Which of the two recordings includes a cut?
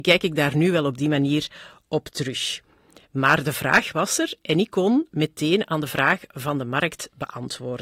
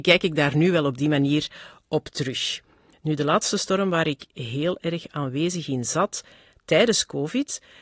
second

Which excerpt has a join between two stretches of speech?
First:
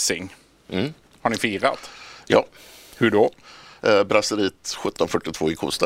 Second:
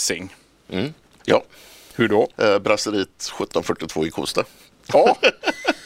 second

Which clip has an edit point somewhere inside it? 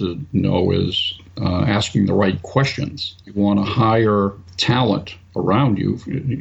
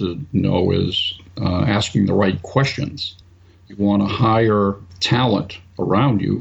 first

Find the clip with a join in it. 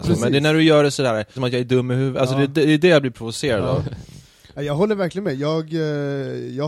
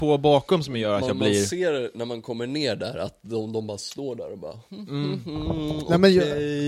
first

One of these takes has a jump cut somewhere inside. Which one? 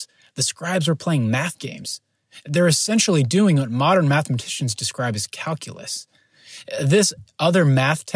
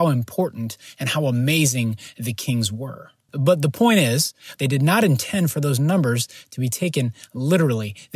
second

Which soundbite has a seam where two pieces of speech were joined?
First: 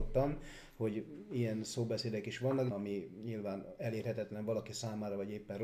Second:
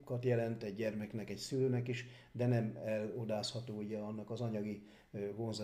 first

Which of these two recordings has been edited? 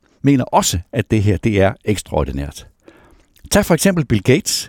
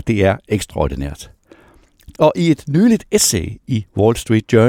second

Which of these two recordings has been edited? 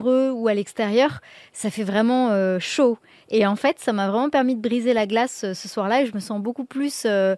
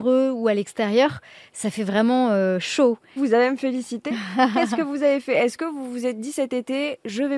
second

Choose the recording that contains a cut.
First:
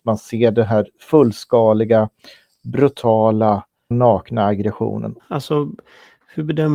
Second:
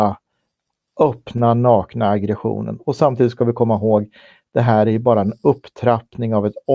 first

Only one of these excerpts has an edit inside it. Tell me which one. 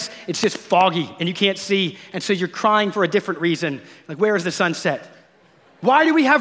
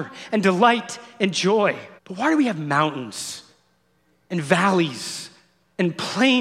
second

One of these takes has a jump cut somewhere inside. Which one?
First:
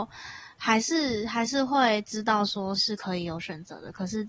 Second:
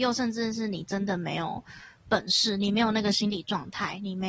first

